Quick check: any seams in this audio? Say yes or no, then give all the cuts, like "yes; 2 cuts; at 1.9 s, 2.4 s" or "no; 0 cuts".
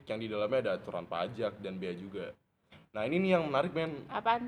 no; 0 cuts